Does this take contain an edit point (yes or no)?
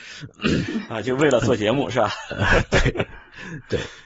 no